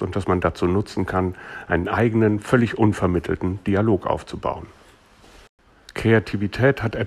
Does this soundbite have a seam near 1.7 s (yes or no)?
no